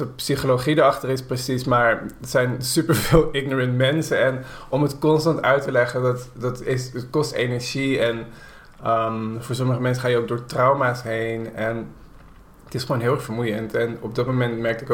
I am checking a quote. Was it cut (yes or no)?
no